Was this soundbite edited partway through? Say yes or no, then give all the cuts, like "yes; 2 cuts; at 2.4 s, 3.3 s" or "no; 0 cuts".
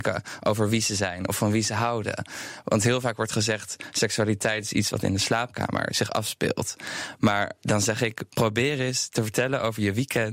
no; 0 cuts